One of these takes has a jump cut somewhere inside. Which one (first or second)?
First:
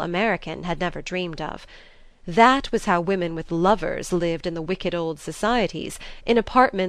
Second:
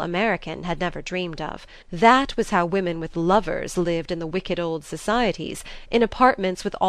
second